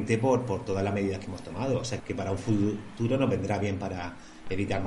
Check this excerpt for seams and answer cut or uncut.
cut